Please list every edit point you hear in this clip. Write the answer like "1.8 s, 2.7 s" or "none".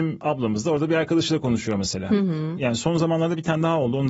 2.6 s